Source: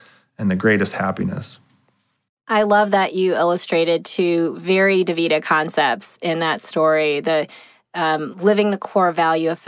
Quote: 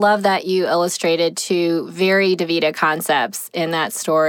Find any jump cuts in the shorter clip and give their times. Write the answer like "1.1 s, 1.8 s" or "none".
none